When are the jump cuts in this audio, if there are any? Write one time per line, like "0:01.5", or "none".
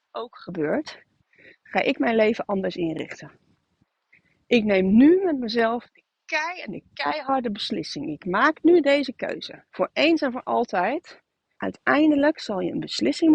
0:09.7
0:11.6